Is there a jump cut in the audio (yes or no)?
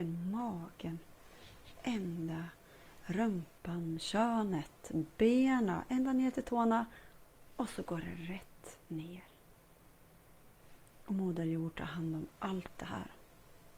no